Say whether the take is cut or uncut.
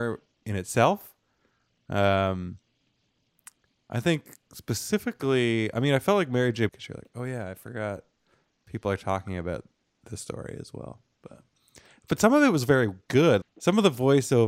cut